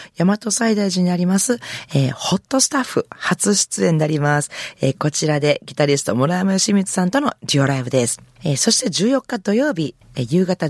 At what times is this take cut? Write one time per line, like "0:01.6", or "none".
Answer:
none